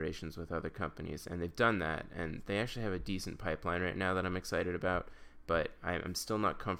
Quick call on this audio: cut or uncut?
uncut